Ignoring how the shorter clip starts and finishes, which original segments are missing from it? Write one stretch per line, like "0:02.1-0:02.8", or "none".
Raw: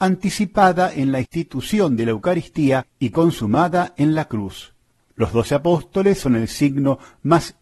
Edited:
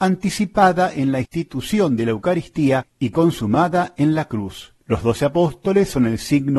0:04.8-0:05.1